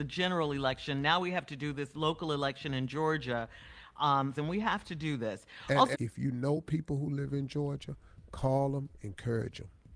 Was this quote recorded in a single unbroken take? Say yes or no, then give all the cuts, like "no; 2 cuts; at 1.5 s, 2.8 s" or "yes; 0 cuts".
no; 2 cuts; at 4.3 s, 5.9 s